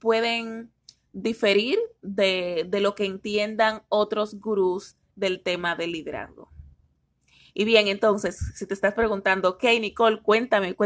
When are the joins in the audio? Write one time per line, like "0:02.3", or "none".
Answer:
none